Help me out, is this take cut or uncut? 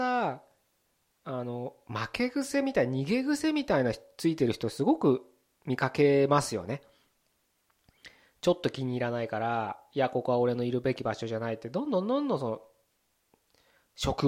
uncut